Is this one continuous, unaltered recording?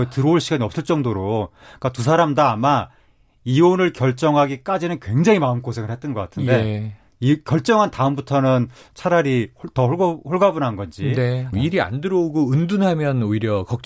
no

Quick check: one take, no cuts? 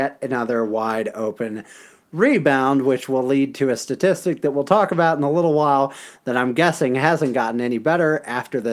yes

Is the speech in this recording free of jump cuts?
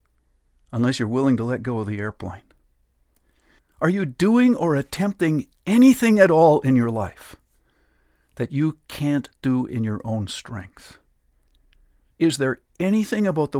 no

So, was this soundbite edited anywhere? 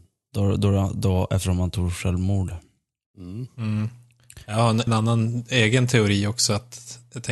yes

